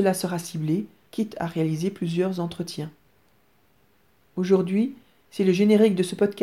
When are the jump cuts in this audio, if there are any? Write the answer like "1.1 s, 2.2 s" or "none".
1.1 s, 4.3 s